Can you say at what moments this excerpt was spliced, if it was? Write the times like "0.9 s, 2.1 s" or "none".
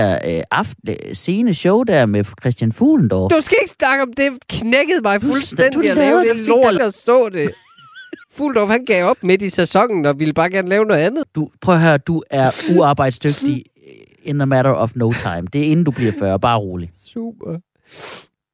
6.8 s, 8.2 s, 11.2 s